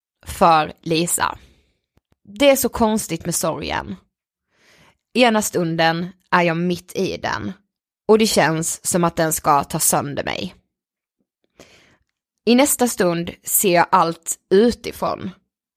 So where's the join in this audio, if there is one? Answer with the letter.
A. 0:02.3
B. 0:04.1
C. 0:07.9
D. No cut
C